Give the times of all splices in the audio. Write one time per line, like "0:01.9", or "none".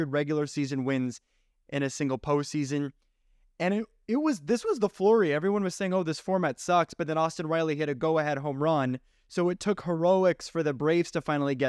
none